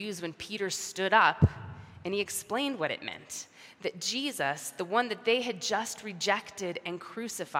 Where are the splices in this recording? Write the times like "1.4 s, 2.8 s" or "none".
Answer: none